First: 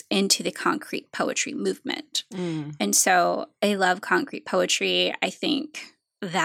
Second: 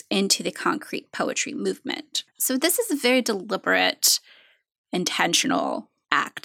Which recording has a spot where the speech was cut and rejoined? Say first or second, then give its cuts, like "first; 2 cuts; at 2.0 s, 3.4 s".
second; 1 cut; at 2.3 s